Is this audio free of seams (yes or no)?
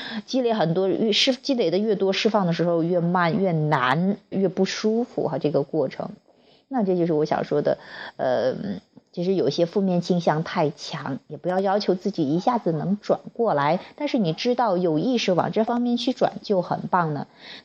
no